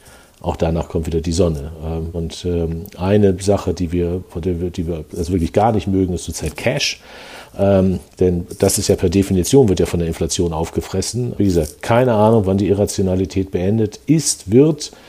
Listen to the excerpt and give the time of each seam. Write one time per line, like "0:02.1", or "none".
0:02.1
0:04.3
0:11.4